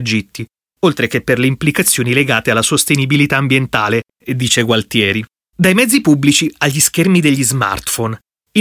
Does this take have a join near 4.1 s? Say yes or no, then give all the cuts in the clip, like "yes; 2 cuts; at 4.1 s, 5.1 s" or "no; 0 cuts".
yes; 1 cut; at 4.1 s